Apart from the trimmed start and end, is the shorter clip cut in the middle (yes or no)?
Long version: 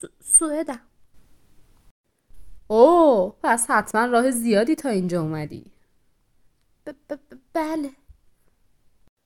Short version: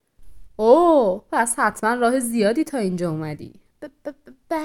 yes